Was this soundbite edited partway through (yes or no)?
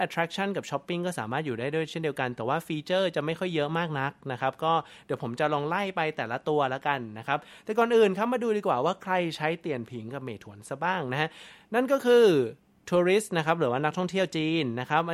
no